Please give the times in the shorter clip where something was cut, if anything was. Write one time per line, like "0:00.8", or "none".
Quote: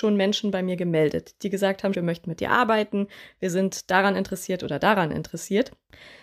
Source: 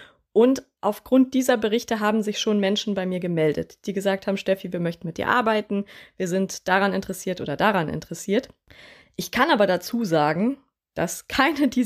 0:01.9